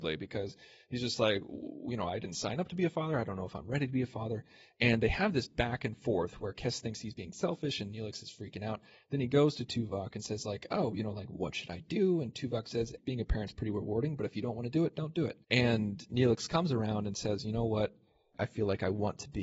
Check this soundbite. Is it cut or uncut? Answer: cut